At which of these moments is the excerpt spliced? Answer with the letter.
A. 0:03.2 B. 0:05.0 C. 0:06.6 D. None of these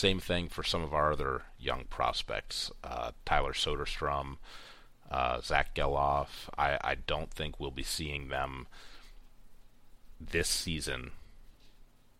D